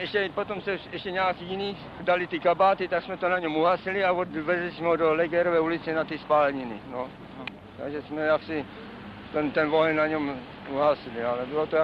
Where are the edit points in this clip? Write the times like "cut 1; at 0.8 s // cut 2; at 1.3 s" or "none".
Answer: none